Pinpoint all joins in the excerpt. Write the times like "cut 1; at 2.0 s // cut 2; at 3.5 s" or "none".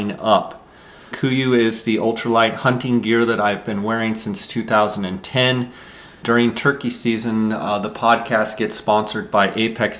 cut 1; at 1.1 s // cut 2; at 6.2 s